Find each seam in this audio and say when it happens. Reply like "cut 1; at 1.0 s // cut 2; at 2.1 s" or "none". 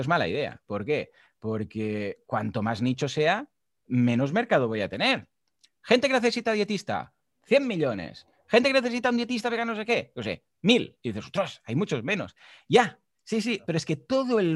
none